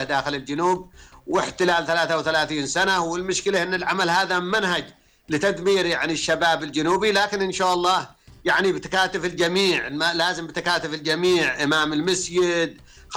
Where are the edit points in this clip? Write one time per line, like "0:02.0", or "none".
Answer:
none